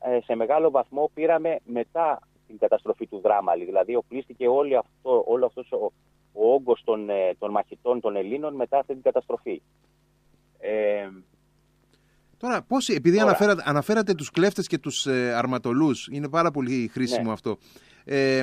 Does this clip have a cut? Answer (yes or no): no